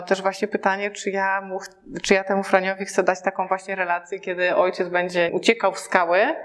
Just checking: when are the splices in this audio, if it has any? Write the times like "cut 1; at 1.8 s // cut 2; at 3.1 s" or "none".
cut 1; at 5.3 s